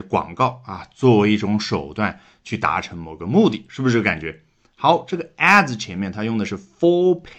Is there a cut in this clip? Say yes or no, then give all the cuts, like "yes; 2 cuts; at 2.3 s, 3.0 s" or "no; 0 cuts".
no; 0 cuts